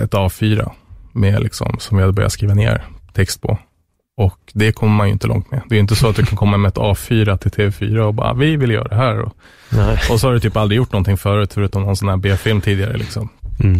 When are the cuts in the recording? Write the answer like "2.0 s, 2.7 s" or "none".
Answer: none